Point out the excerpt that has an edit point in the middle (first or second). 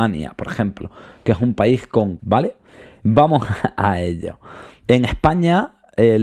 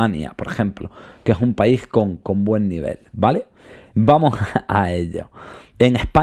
first